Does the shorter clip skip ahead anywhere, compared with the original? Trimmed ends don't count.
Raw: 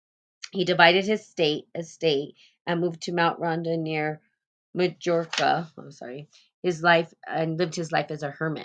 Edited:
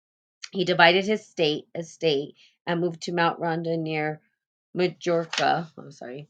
no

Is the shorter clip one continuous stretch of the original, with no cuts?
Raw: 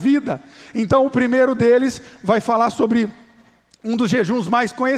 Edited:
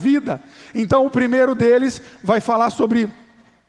yes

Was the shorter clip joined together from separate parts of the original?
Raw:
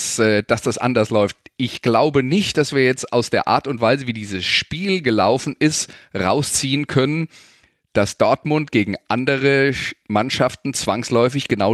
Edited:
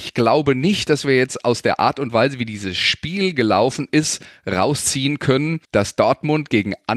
yes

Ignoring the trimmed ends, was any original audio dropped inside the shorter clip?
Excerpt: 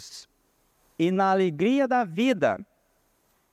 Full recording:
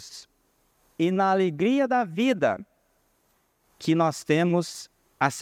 no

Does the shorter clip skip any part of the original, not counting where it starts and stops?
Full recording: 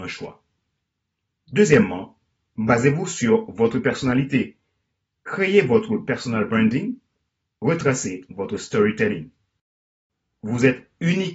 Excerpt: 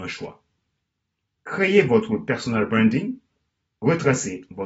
yes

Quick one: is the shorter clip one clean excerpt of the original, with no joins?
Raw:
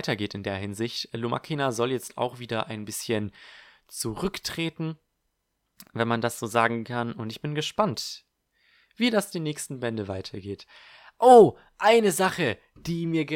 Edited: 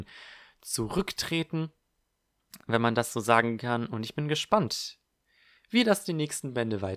yes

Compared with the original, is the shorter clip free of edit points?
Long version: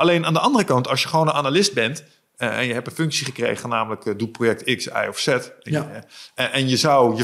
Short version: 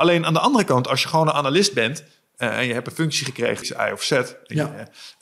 no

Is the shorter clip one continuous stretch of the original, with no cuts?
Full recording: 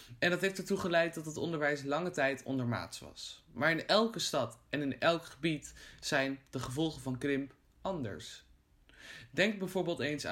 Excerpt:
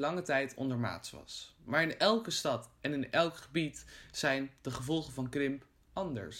yes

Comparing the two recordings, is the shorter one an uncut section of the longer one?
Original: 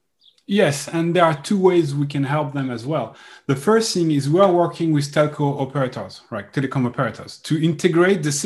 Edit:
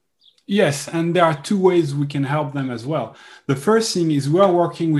yes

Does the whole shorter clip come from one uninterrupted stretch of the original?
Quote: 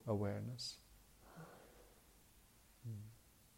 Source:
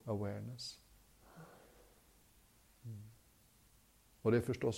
yes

